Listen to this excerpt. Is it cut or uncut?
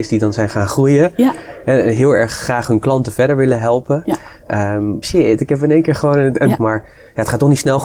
cut